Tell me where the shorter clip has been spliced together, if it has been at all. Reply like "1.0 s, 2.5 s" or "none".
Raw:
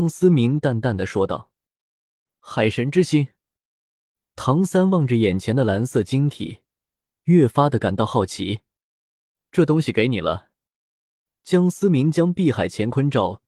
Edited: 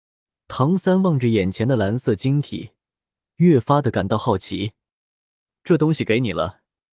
none